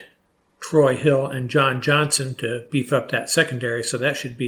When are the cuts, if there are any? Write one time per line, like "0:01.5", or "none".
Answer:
none